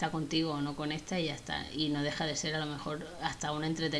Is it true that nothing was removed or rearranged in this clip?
yes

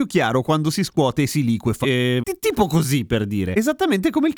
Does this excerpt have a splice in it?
yes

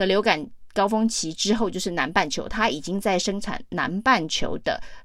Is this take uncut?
yes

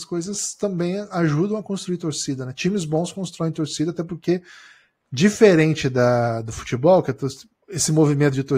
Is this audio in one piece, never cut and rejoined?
yes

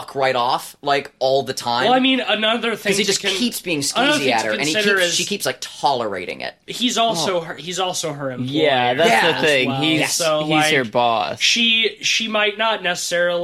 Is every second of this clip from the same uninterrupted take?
yes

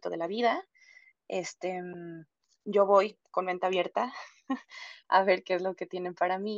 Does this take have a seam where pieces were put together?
no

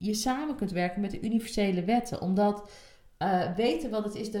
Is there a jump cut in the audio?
no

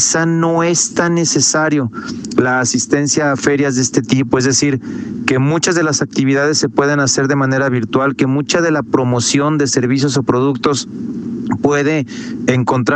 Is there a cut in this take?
no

